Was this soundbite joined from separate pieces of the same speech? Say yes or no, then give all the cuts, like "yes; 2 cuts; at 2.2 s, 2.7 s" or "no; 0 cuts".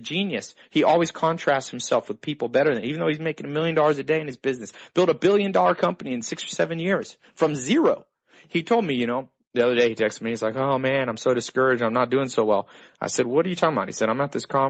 no; 0 cuts